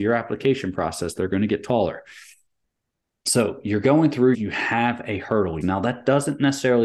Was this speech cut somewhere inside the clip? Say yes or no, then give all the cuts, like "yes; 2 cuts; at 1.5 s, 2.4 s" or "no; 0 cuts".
yes; 2 cuts; at 4.3 s, 5.6 s